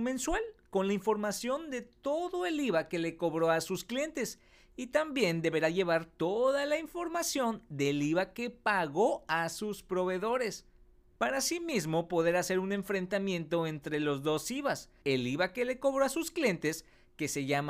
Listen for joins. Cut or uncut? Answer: cut